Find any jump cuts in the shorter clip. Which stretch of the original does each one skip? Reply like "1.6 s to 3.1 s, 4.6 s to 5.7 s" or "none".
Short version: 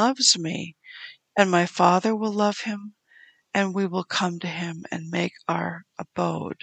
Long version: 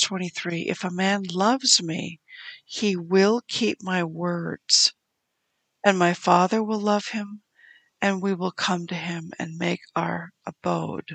2.6 s to 5.6 s